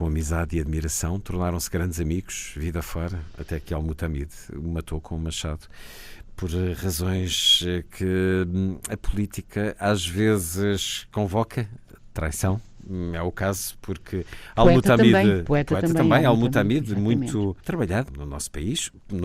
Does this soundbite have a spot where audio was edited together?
no; 0 cuts

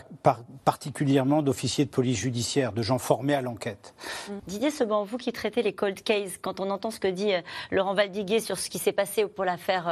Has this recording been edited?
yes; 1 cut; at 4.4 s

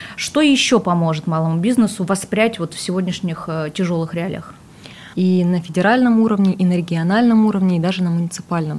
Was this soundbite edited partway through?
yes; 1 cut; at 5.1 s

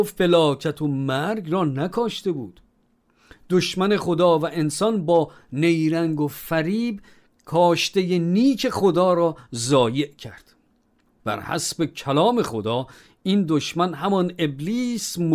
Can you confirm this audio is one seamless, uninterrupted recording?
yes; 0 cuts

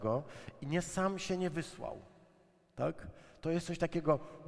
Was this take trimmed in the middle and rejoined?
no; 0 cuts

